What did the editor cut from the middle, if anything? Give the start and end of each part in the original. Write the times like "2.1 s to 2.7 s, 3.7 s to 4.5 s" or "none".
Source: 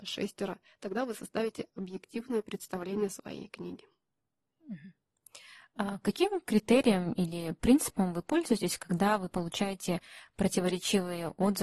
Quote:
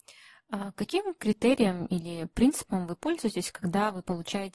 none